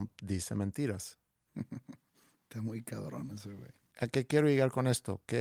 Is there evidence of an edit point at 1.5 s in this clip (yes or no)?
yes